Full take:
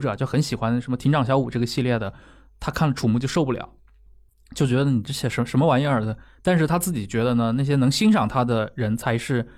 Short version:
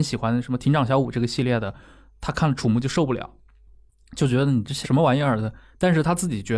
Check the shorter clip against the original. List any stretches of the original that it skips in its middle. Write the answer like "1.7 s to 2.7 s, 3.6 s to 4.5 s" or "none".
5.2 s to 5.5 s

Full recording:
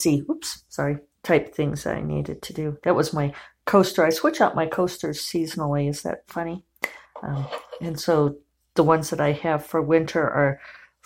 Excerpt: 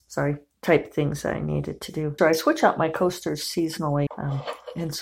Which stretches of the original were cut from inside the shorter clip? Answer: 2.8 s to 4.0 s, 5.8 s to 7.1 s

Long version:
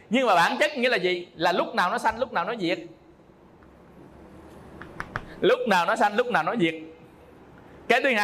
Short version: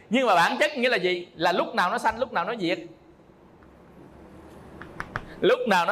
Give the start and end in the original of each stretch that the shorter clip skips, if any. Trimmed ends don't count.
none

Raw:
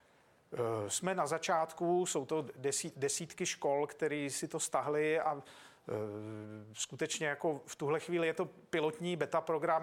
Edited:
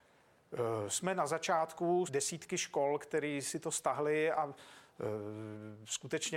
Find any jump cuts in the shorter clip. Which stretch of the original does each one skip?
2.1 s to 2.9 s

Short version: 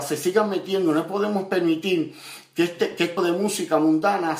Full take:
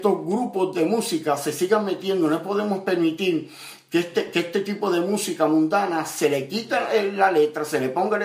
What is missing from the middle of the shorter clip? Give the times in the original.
4.5 s to 4.9 s

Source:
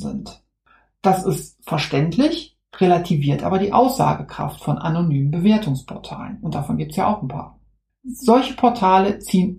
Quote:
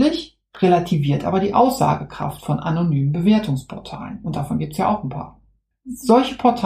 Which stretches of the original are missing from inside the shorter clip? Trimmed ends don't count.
none

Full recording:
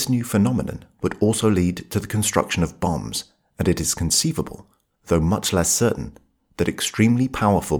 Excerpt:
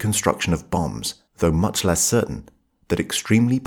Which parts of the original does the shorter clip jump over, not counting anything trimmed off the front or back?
3.4 s to 5.0 s

